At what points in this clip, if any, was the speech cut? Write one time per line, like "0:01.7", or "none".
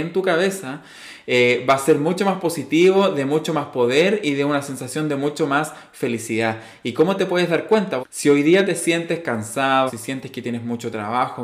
0:08.0
0:09.9